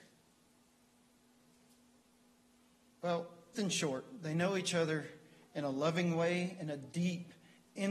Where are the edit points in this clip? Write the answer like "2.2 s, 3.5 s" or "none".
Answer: 3.5 s